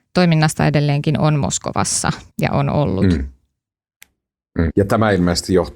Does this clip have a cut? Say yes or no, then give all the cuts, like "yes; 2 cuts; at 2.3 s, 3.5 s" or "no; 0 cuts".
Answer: yes; 2 cuts; at 2.3 s, 4.7 s